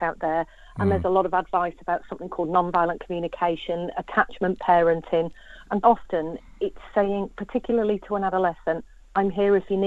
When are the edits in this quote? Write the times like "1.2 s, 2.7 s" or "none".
5.8 s